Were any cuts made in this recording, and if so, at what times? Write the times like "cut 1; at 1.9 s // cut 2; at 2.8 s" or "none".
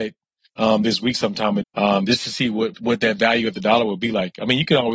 cut 1; at 1.6 s // cut 2; at 2.7 s